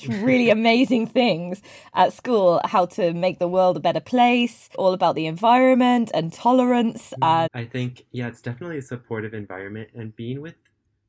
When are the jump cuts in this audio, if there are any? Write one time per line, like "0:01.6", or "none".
0:04.7
0:07.5